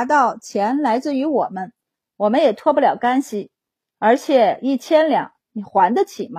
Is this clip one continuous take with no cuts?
yes; 0 cuts

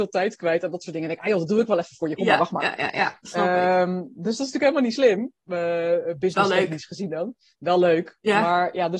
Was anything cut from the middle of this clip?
no; 0 cuts

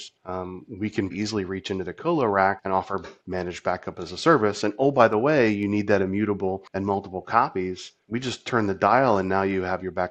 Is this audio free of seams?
no; 1 cut; at 1.1 s

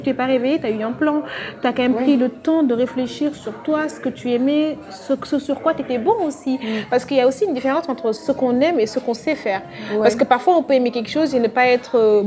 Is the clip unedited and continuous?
yes; 0 cuts

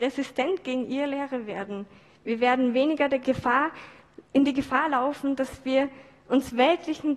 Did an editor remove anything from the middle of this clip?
yes; 1 cut; at 3.2 s

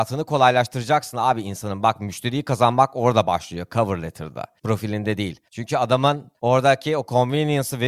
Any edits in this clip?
no; 0 cuts

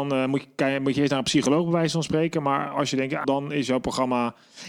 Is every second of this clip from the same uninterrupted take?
no; 1 cut; at 3.2 s

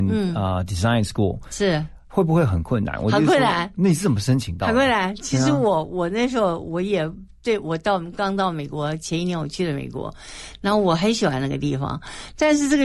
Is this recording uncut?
yes; 0 cuts

